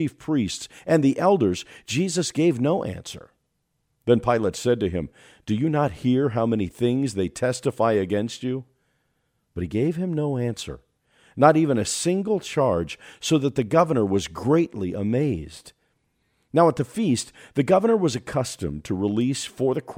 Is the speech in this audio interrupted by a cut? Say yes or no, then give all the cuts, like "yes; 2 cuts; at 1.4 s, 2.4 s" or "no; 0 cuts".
no; 0 cuts